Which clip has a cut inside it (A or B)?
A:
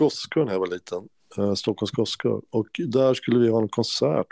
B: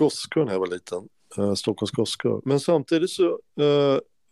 B